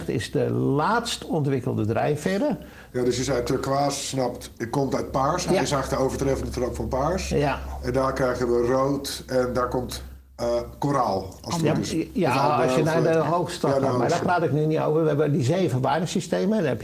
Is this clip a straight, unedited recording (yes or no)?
no